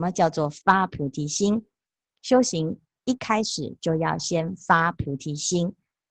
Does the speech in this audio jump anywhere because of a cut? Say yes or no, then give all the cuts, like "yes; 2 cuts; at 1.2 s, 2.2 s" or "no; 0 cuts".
no; 0 cuts